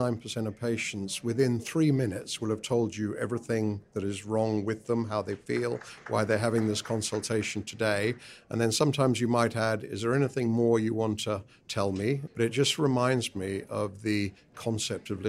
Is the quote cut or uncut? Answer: cut